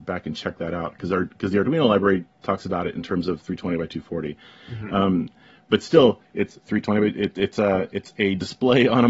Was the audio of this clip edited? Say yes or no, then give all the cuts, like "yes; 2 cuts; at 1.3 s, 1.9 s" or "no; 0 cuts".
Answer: no; 0 cuts